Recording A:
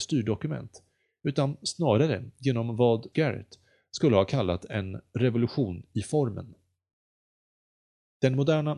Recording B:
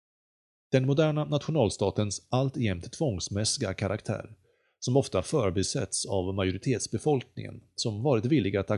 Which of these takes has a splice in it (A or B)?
A